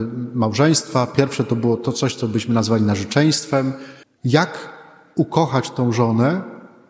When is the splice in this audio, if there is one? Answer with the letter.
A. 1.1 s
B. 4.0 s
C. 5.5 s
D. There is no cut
B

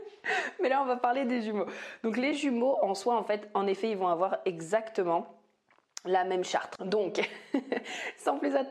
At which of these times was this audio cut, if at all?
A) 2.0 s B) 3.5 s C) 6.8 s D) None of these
C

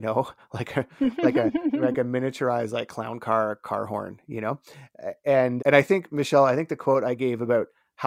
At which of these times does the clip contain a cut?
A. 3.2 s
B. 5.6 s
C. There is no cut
B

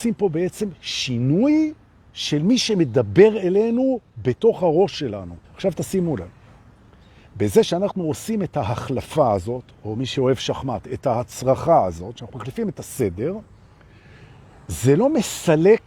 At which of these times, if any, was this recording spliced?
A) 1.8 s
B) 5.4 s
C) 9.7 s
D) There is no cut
B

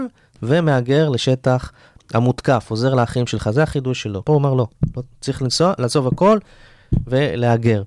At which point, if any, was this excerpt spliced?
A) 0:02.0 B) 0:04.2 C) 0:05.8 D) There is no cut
B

